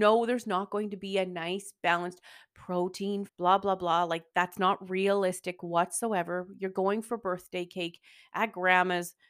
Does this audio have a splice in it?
yes; 1 cut; at 3.3 s

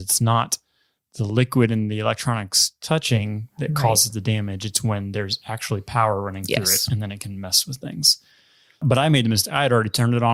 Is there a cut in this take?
no; 0 cuts

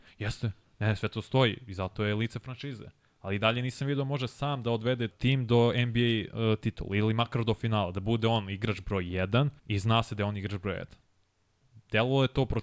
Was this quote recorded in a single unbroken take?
no; 2 cuts; at 5.1 s, 9.6 s

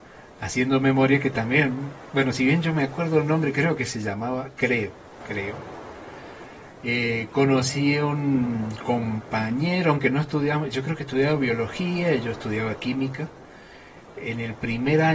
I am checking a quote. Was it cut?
yes; 1 cut; at 5.2 s

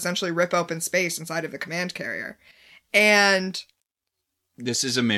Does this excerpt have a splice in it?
no; 0 cuts

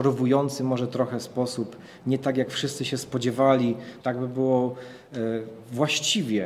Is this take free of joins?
no; 1 cut; at 4.0 s

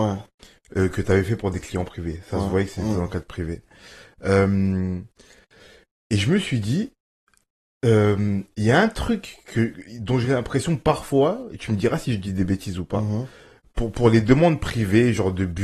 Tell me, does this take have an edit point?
no; 0 cuts

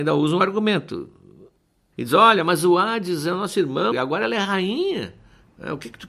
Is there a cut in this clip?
yes; 2 cuts; at 1.9 s, 3.9 s

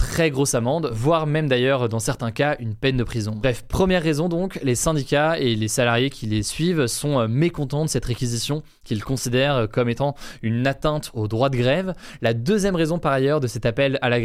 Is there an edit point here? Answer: no; 0 cuts

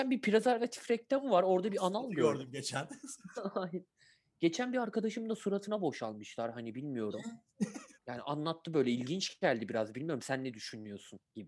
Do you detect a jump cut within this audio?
yes; 1 cut; at 7.9 s

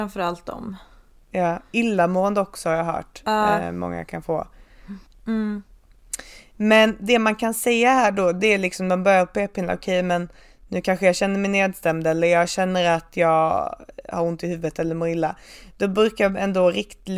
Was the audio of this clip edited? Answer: yes; 1 cut; at 5.1 s

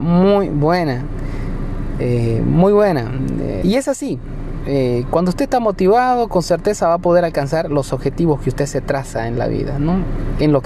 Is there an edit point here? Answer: yes; 1 cut; at 3.6 s

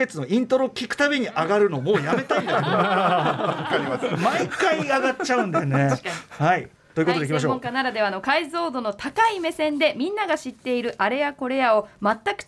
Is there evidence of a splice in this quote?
no; 0 cuts

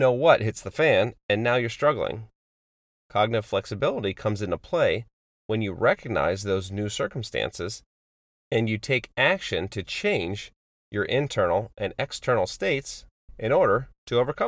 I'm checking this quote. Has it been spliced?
no; 0 cuts

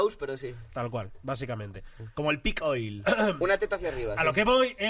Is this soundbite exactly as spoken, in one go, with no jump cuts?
yes; 0 cuts

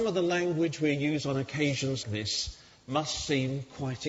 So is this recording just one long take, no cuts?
no; 1 cut; at 2.0 s

